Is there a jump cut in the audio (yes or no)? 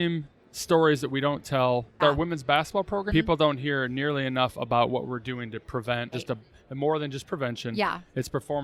yes